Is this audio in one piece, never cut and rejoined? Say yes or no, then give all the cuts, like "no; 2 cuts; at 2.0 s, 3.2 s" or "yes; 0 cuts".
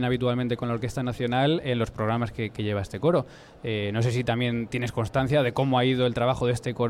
yes; 0 cuts